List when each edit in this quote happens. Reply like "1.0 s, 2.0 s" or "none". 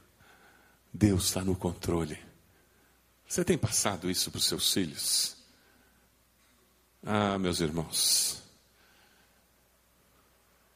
none

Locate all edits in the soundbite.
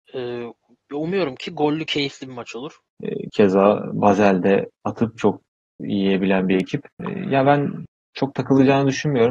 2.9 s

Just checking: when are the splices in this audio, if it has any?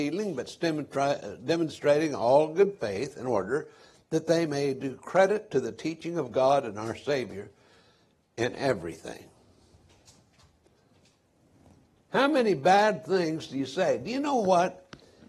12.0 s

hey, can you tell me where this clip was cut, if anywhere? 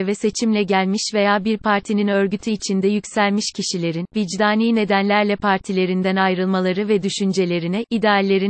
none

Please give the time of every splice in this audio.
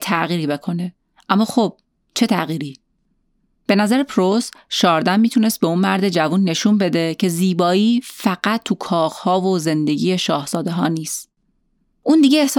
none

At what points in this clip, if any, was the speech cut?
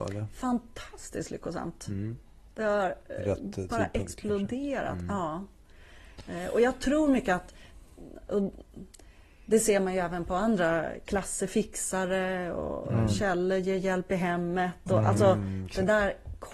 none

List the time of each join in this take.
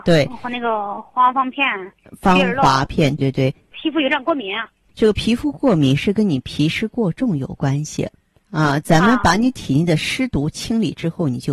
3.2 s

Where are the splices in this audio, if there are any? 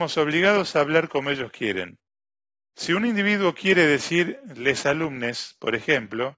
none

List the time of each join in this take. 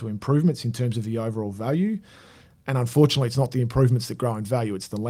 none

